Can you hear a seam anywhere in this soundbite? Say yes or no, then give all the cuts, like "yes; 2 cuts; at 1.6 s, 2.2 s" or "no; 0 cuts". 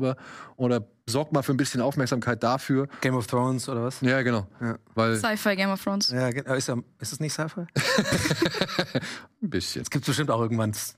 no; 0 cuts